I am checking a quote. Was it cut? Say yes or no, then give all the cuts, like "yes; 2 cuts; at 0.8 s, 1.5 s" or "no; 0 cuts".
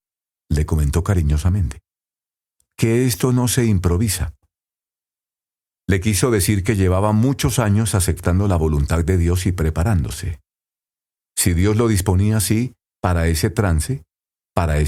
no; 0 cuts